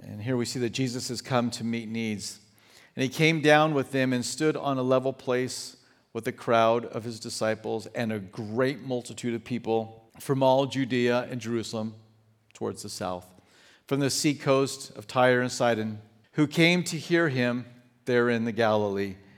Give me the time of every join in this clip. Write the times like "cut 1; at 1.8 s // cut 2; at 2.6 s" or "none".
cut 1; at 10.1 s // cut 2; at 16.2 s